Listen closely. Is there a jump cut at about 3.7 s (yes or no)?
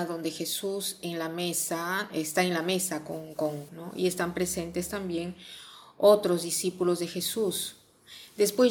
yes